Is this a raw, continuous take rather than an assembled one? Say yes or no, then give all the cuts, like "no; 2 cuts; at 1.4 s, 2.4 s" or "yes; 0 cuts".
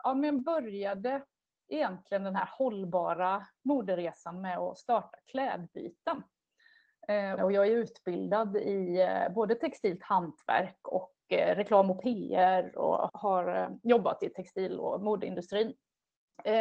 no; 2 cuts; at 7.4 s, 13.1 s